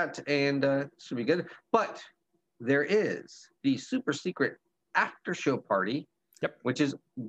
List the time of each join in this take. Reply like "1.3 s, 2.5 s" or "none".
3.6 s